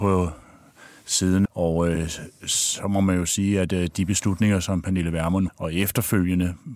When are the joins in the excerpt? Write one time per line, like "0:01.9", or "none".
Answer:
0:01.5
0:05.5